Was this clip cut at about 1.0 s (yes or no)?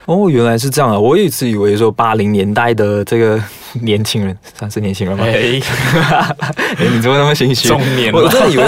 no